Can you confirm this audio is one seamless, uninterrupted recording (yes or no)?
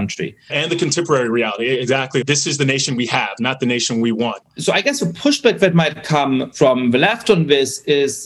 no